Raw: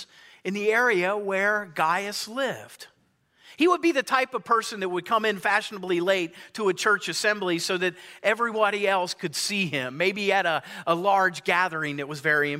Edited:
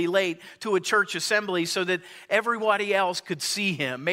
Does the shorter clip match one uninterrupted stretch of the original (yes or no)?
yes